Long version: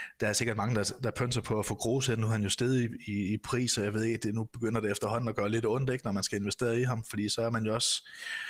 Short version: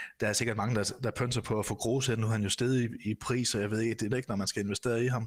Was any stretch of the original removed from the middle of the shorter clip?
yes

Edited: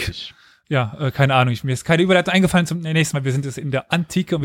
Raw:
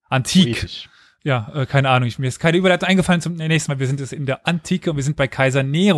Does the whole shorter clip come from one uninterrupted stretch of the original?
yes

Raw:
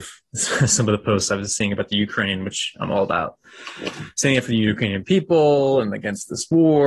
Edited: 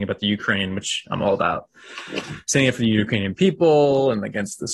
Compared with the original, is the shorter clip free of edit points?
yes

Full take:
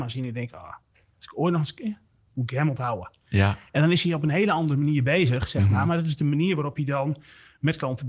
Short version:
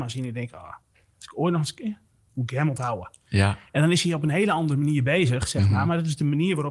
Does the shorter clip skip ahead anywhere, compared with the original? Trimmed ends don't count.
no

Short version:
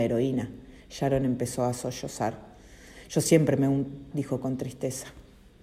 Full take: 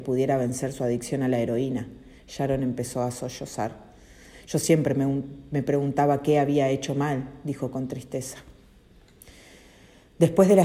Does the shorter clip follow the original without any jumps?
no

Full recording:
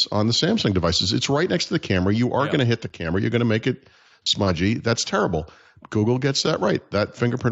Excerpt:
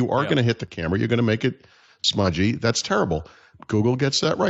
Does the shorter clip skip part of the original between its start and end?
no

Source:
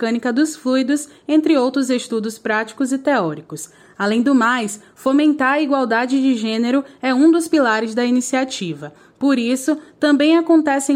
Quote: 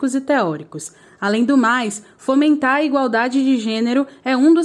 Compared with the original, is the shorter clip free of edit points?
yes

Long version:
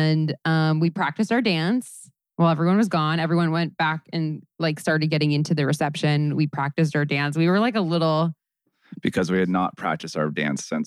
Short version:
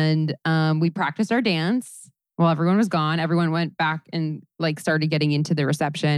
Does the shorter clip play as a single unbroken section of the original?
yes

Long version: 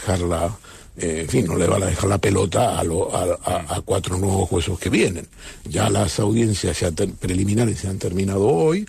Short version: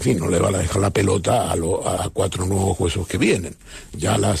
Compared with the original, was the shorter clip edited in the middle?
yes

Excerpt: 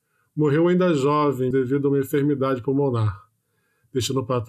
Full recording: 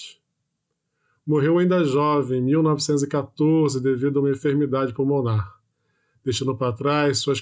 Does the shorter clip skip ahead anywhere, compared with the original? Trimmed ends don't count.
yes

